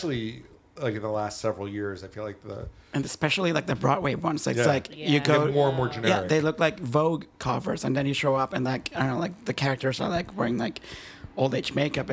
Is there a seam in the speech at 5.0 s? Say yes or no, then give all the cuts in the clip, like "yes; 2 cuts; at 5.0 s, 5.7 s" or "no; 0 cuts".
no; 0 cuts